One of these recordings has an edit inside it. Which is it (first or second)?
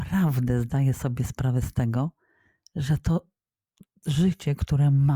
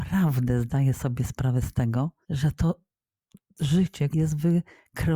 second